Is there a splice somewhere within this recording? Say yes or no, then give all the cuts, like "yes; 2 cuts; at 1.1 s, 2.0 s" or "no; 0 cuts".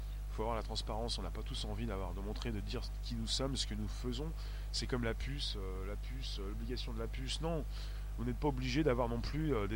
no; 0 cuts